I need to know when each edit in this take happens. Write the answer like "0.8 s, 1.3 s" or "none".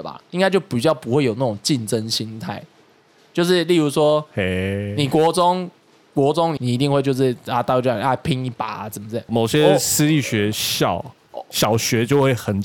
6.6 s, 9.3 s